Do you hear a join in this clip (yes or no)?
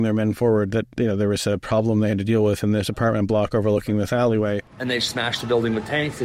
yes